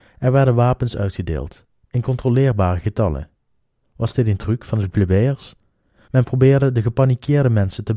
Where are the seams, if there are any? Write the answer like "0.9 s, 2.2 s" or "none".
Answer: 3.8 s, 6.1 s